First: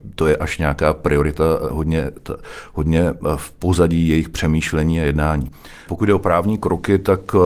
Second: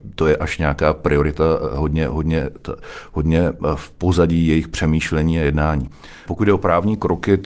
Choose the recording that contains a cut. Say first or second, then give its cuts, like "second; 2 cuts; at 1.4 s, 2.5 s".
first; 1 cut; at 1.7 s